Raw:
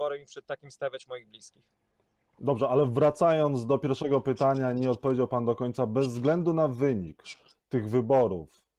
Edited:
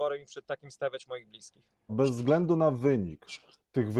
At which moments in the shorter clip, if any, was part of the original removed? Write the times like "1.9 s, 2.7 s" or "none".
1.9 s